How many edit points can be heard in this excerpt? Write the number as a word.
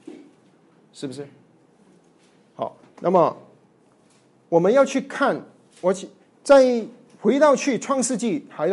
zero